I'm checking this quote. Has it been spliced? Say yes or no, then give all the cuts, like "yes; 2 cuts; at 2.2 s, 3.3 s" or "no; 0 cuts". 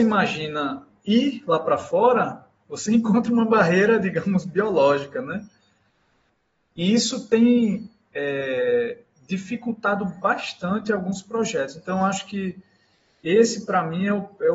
no; 0 cuts